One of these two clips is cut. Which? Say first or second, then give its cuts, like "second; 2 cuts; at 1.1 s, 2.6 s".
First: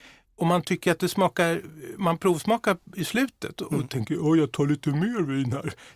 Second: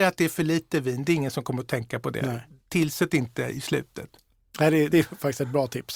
second; 1 cut; at 4.9 s